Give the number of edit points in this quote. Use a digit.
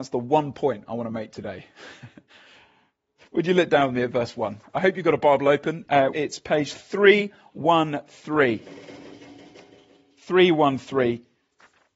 1